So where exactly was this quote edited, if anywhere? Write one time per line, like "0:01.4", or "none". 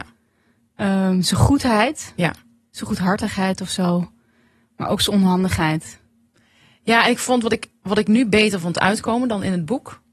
none